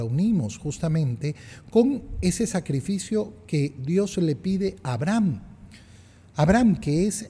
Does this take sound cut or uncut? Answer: uncut